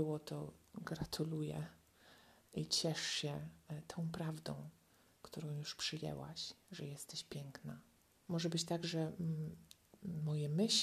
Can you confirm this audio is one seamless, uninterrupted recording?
no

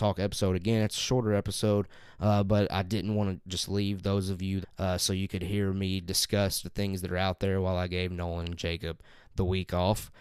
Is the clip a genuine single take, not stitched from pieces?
no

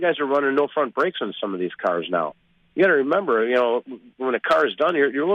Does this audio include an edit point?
no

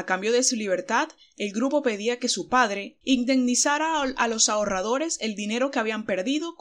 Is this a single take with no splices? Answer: no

